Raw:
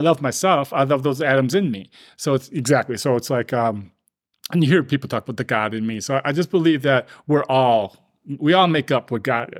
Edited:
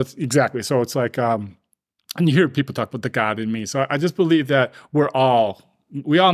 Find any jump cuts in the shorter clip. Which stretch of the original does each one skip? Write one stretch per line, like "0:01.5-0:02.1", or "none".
none